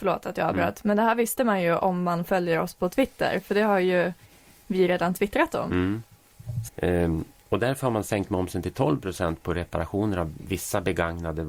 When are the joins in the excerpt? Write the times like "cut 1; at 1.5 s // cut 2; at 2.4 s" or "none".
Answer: cut 1; at 6.7 s